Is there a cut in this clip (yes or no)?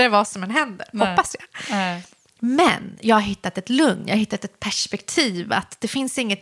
no